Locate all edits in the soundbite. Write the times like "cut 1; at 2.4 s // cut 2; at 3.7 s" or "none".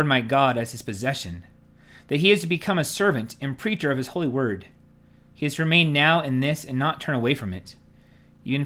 none